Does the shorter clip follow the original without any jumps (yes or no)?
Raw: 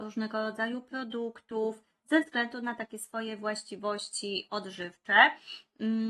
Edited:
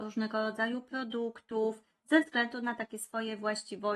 yes